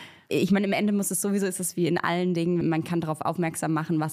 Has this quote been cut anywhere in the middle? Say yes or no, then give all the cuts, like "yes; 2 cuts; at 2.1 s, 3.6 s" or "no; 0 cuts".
yes; 1 cut; at 2.6 s